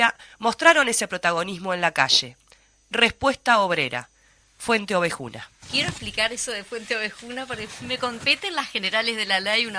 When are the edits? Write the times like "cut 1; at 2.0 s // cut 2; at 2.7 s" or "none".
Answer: cut 1; at 5.6 s